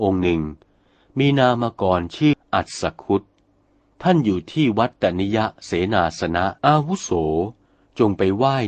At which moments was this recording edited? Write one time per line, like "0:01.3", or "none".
0:02.3
0:06.6